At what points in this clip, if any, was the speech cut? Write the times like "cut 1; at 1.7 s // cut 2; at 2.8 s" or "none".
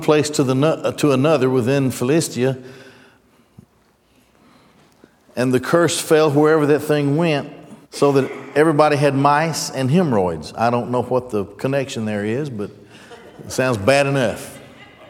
cut 1; at 7.8 s